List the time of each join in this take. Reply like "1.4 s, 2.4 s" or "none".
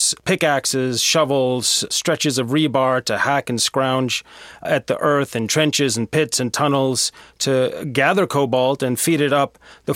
4.6 s